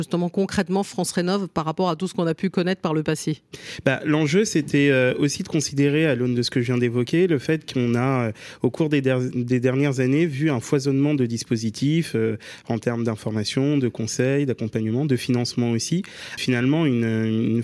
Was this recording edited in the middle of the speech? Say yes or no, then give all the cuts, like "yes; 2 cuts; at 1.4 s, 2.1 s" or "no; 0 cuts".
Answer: yes; 1 cut; at 16.4 s